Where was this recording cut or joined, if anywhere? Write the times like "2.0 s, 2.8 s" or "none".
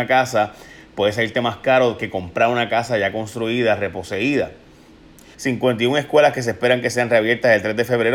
5.3 s